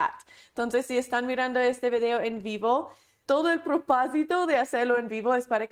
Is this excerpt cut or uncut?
cut